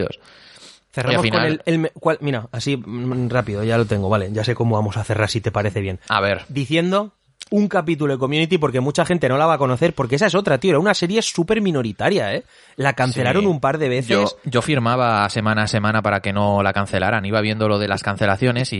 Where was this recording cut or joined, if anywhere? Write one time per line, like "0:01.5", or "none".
none